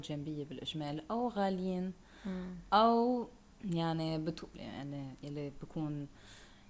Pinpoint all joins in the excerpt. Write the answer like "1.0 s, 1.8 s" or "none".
4.5 s